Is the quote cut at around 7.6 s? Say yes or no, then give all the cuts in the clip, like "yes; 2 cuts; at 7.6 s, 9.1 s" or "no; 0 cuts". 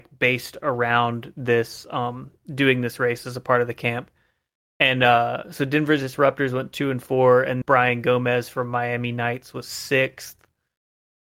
yes; 1 cut; at 7.6 s